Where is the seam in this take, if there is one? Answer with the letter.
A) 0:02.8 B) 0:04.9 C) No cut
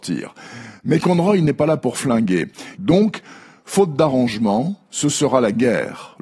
A